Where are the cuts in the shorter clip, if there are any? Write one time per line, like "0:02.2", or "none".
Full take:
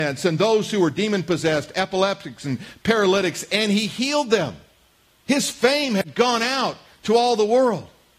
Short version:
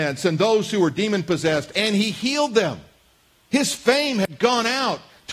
0:01.7